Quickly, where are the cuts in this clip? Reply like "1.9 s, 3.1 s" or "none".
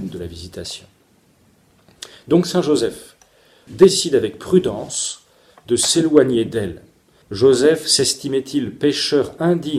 3.7 s, 7.2 s